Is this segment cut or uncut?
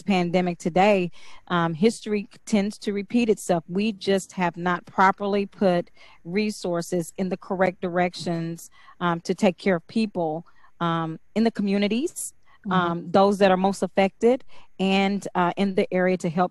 uncut